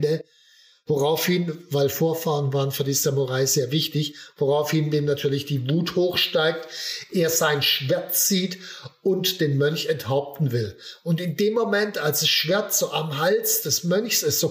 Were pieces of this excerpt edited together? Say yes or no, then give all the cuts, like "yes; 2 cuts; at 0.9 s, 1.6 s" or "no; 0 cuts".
no; 0 cuts